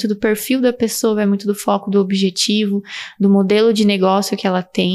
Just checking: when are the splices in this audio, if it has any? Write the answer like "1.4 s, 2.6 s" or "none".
none